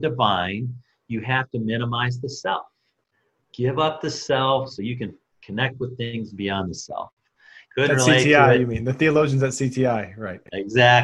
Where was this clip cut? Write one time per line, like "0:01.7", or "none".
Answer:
0:07.6